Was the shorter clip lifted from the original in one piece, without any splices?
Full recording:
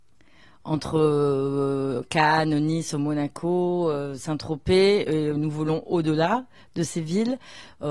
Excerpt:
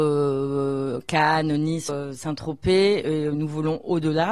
no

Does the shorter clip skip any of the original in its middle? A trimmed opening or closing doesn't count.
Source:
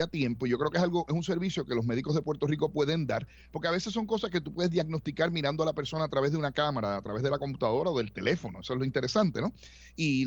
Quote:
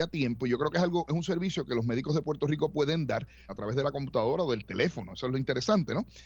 yes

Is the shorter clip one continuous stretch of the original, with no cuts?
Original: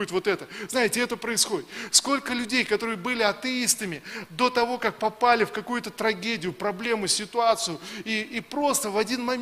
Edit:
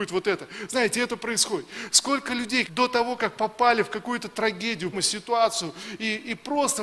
no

